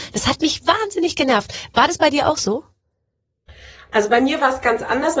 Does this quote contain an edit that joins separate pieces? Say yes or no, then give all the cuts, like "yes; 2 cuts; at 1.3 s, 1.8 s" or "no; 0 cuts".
no; 0 cuts